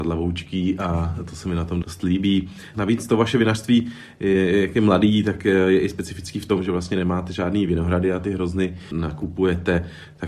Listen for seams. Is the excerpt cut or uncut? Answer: uncut